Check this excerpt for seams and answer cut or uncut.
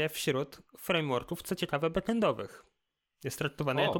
uncut